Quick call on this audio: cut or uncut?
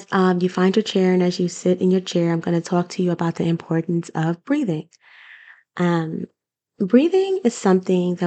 uncut